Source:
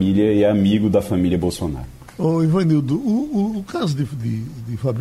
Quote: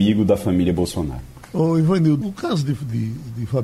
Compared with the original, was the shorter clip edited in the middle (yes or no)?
yes